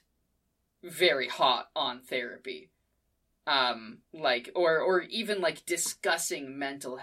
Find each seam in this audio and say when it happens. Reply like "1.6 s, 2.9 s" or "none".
4.0 s